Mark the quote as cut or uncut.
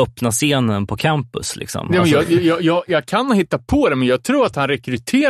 uncut